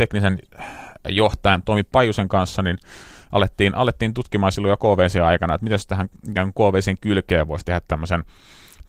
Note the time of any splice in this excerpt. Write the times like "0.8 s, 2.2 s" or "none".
none